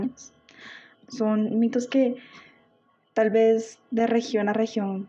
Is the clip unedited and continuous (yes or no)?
no